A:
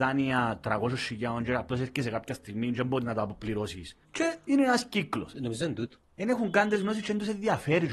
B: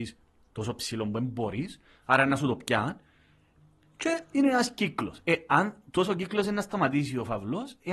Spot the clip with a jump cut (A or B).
A